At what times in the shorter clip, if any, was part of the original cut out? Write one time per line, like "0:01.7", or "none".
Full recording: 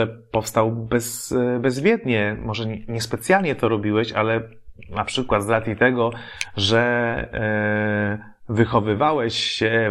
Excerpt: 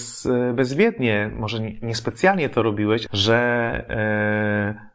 0:03.1